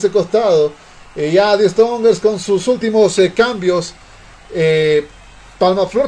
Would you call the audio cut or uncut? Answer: uncut